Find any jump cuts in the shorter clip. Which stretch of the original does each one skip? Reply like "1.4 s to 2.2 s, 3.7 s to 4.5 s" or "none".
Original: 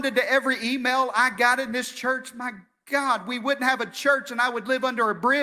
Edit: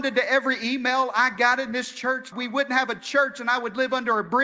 2.3 s to 3.2 s